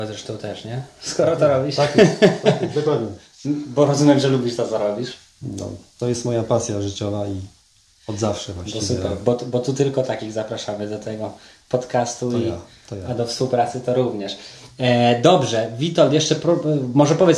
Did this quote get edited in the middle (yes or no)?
no